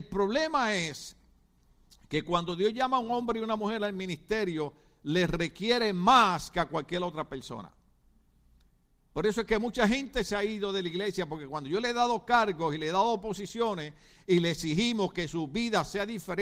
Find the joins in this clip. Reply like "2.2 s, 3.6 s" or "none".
none

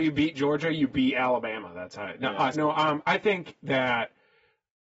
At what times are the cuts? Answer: 2.5 s

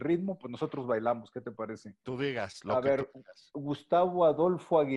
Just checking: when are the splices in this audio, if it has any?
2.0 s

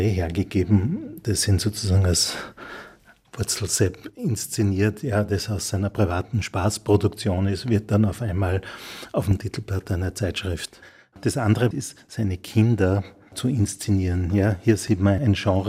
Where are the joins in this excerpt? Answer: 11.7 s

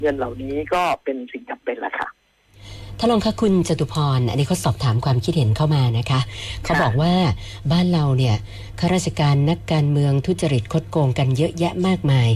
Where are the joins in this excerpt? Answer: none

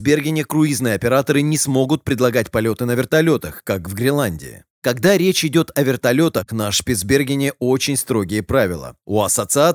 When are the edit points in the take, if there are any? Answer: none

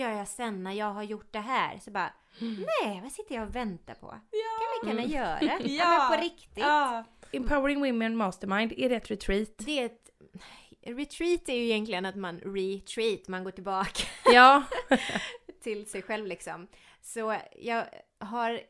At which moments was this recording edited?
none

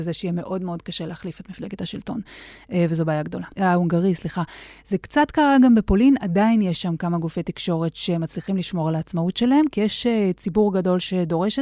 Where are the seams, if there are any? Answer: 3.6 s

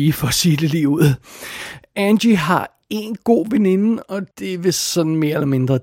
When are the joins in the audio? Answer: 4.3 s

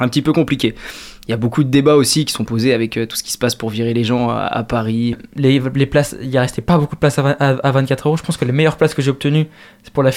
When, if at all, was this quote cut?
5.1 s

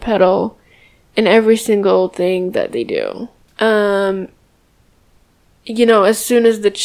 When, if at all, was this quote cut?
3.5 s

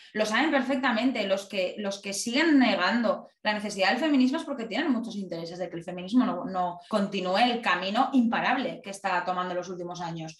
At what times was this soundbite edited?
6.9 s, 8.8 s

